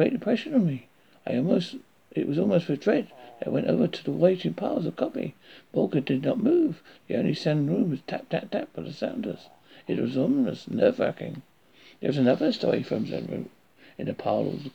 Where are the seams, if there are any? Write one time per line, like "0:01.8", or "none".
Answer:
none